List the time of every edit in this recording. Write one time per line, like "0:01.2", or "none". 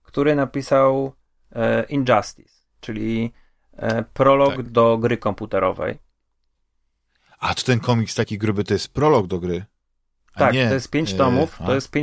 none